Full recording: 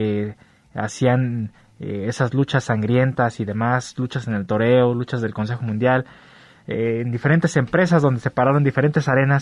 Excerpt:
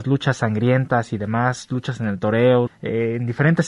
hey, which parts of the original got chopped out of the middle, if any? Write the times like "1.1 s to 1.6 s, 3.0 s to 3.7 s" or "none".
4.9 s to 6.5 s